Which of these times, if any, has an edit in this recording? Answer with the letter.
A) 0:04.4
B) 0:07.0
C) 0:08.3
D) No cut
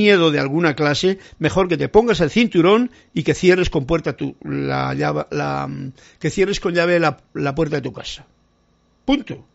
D